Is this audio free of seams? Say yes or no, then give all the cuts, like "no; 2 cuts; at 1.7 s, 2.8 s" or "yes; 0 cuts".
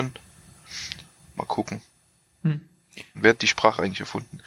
no; 1 cut; at 3.1 s